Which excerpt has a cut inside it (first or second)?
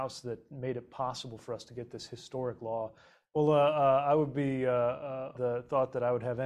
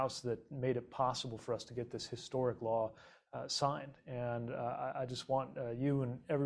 first